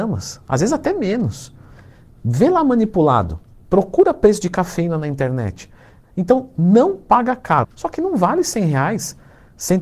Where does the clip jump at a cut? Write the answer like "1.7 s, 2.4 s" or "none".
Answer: 6.0 s, 7.6 s